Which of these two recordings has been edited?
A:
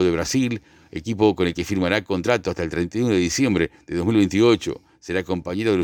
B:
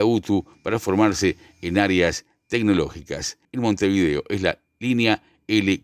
B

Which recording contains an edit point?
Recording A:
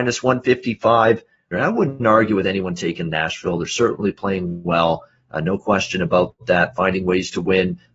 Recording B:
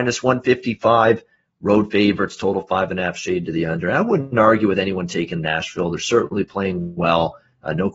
A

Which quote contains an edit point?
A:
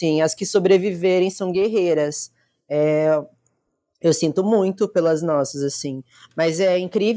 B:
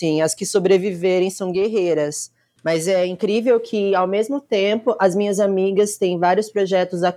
B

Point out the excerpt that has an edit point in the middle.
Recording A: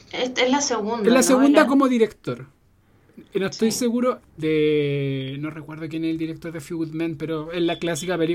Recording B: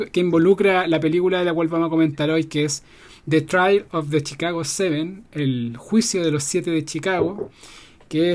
A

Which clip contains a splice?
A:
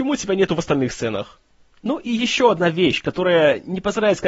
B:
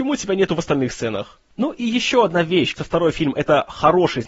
B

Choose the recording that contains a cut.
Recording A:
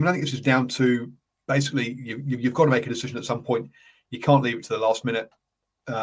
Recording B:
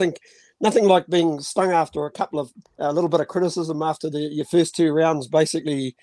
B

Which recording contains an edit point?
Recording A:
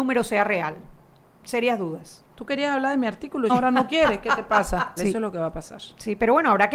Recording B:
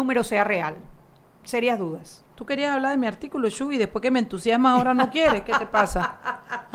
A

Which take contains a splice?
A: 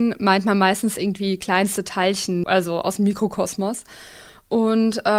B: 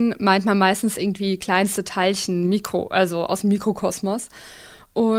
A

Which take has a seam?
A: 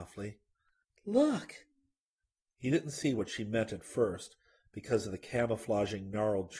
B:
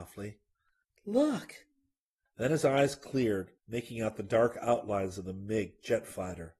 B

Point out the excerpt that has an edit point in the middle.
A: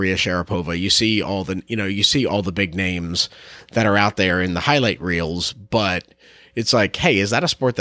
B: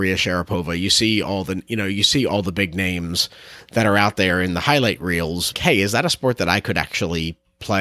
B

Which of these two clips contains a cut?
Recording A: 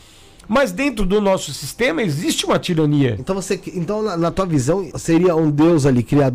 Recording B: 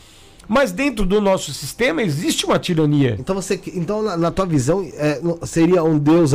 A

